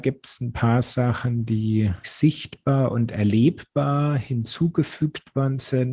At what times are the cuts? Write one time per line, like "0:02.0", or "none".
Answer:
0:02.0